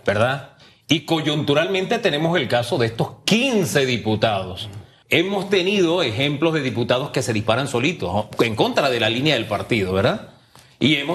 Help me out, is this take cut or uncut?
cut